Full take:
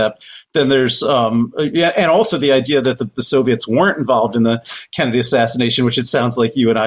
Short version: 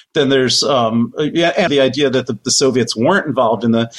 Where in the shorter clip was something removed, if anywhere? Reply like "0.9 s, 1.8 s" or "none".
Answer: 1.7 s